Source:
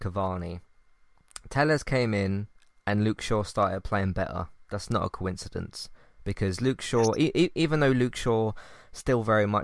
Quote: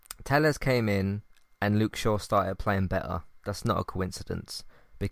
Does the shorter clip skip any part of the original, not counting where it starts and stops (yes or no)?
no